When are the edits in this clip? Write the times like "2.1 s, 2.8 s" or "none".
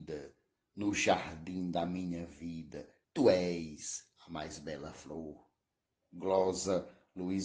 none